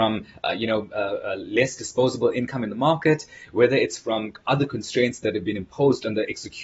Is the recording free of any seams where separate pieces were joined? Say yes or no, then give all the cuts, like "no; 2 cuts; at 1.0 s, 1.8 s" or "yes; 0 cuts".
yes; 0 cuts